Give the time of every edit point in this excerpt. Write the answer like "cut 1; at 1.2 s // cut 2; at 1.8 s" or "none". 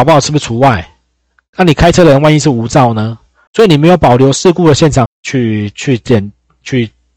cut 1; at 3.5 s // cut 2; at 5.1 s